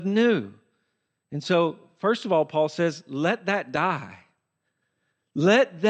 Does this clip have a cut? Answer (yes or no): no